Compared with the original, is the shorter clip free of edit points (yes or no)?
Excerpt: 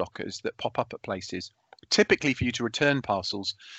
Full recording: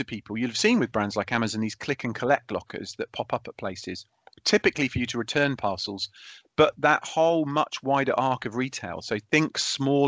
yes